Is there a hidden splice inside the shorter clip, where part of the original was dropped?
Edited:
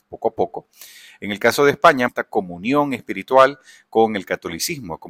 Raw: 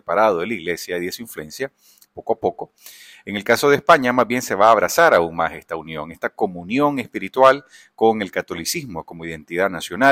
yes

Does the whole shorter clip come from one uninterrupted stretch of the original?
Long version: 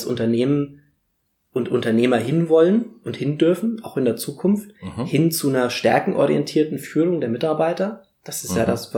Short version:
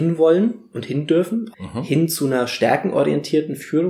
no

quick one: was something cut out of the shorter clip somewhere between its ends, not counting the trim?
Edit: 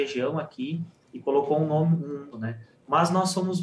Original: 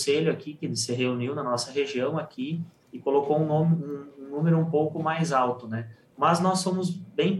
yes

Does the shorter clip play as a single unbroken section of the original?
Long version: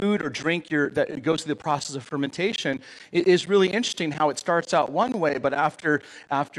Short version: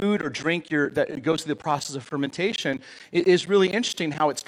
yes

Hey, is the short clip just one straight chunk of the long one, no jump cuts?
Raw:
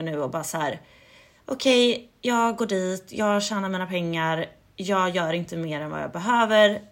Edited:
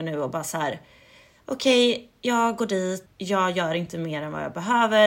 no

